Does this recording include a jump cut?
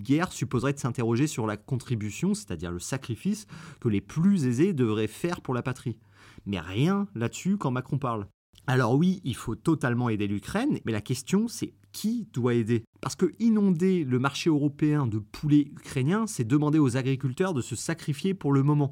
yes; 1 cut; at 10.8 s

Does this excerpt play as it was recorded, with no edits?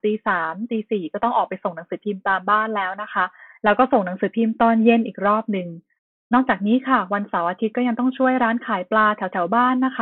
yes; 0 cuts

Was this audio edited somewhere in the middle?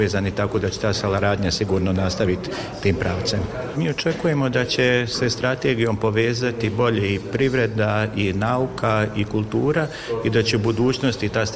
yes; 1 cut; at 3.7 s

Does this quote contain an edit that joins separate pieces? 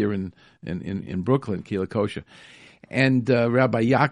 no; 0 cuts

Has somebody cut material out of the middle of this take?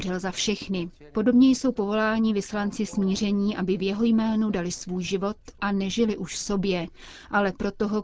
no; 0 cuts

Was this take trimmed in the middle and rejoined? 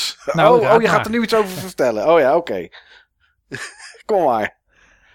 no; 0 cuts

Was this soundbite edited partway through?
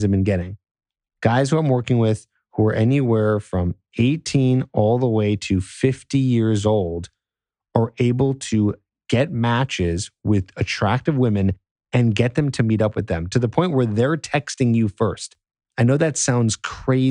no; 0 cuts

